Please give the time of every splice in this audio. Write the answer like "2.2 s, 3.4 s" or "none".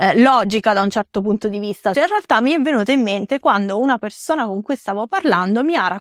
1.9 s